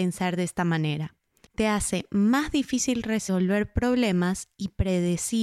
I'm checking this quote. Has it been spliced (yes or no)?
yes